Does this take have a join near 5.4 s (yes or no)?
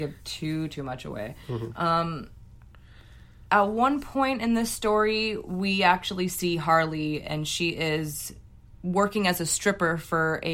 no